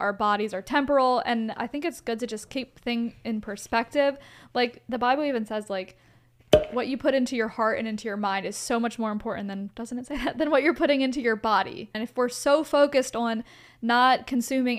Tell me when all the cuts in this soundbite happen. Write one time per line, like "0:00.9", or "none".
none